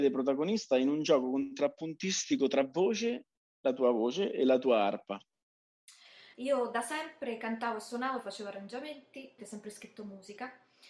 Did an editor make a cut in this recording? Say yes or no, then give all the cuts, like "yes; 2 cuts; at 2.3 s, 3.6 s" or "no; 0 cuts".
yes; 2 cuts; at 6.3 s, 9.4 s